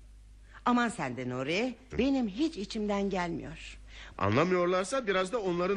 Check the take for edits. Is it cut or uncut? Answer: cut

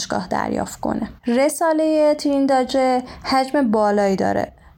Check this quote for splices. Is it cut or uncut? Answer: cut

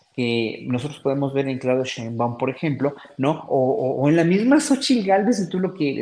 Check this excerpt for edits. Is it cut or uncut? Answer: uncut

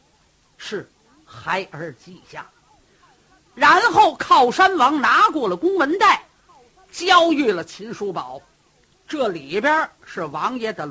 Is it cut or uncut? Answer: uncut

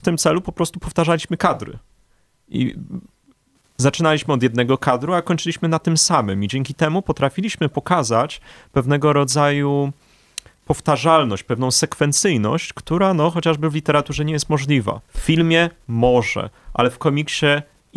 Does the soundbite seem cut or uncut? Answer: cut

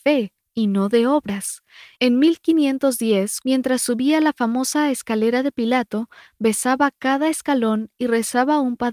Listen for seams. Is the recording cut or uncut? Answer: cut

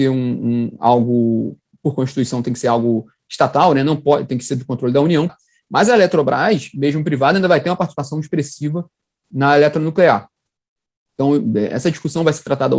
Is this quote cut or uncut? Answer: cut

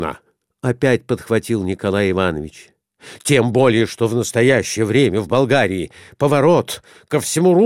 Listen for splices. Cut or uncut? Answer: uncut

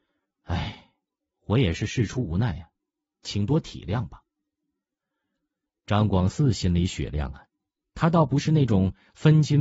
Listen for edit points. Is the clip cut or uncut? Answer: uncut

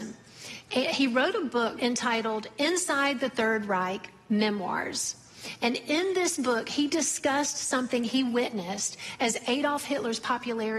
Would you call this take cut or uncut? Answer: cut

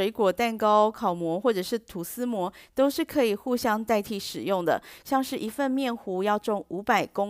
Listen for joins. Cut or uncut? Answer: cut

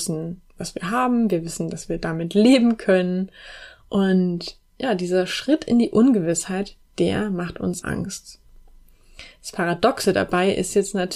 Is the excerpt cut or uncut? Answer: cut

